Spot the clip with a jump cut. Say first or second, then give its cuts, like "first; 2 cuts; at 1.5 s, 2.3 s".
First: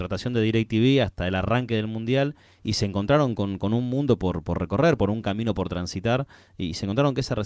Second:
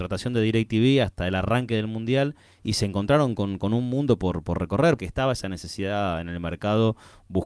second; 1 cut; at 5.0 s